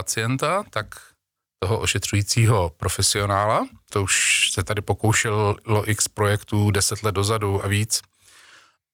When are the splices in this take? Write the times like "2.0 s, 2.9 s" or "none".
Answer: 3.9 s